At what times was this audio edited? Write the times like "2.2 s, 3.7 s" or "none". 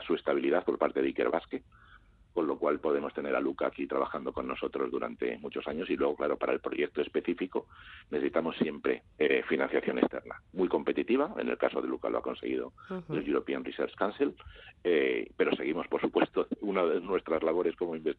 9.1 s